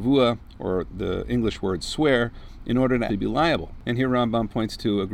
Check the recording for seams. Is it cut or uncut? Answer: cut